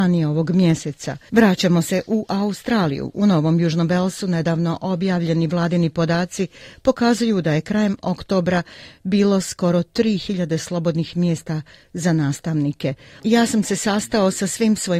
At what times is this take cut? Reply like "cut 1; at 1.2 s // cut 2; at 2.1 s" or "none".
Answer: cut 1; at 1.3 s // cut 2; at 13.2 s